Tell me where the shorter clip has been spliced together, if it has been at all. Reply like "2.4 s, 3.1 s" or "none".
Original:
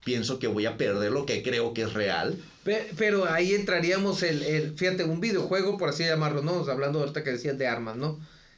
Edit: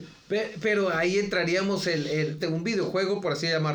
2.4 s